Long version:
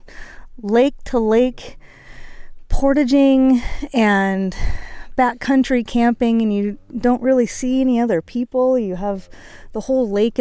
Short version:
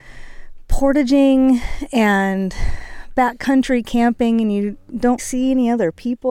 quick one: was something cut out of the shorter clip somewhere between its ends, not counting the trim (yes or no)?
yes